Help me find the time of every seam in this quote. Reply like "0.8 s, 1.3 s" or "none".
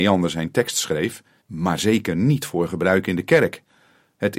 1.4 s